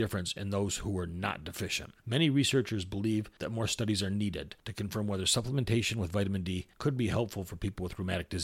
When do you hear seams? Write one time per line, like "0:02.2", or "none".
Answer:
none